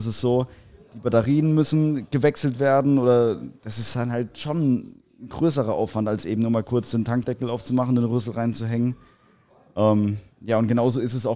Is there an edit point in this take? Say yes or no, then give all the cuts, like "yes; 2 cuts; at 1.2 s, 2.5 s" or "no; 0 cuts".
no; 0 cuts